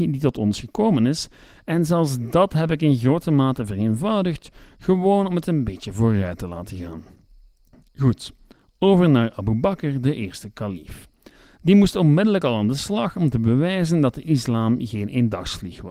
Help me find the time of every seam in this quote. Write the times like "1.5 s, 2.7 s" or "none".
none